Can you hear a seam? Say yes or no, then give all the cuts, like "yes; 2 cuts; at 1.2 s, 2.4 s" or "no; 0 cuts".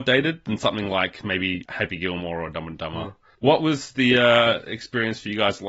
no; 0 cuts